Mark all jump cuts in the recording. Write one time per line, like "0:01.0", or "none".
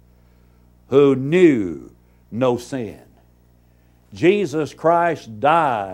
none